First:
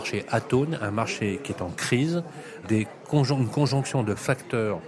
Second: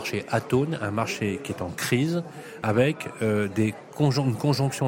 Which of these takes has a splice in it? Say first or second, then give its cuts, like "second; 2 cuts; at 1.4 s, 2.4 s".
first; 1 cut; at 2.6 s